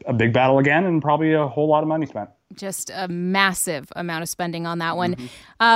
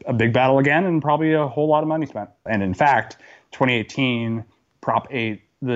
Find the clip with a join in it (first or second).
second